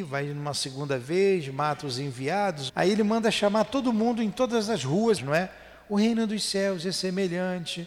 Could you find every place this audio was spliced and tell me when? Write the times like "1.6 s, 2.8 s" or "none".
2.7 s, 5.2 s